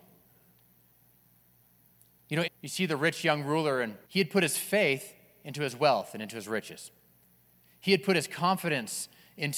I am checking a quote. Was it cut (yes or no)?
yes